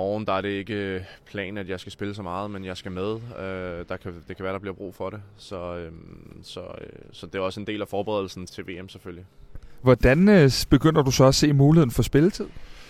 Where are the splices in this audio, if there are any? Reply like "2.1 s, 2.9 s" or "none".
8.5 s, 9.8 s